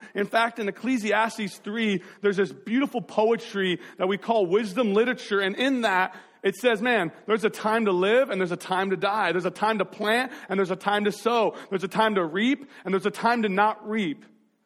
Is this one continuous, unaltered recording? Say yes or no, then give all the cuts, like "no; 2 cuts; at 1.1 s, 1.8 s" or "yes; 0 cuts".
yes; 0 cuts